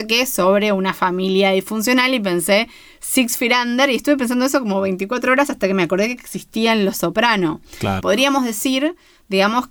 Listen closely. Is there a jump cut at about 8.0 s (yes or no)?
yes